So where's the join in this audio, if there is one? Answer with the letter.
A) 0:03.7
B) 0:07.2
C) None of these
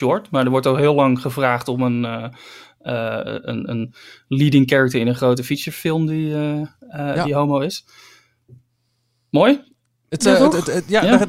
C